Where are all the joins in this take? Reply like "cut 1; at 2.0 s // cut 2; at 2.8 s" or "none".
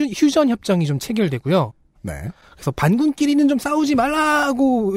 cut 1; at 1.9 s